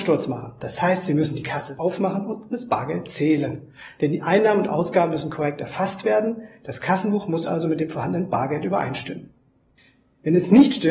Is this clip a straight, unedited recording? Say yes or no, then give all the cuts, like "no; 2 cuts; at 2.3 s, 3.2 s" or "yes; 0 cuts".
yes; 0 cuts